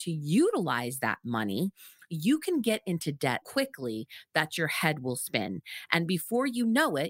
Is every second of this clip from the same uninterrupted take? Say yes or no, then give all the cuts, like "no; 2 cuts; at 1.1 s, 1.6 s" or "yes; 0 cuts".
no; 1 cut; at 3.4 s